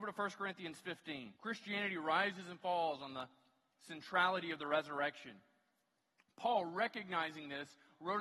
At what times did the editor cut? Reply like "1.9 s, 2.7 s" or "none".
1.4 s